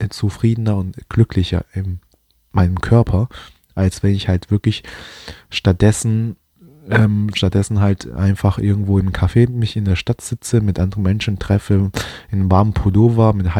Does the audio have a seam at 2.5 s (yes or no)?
no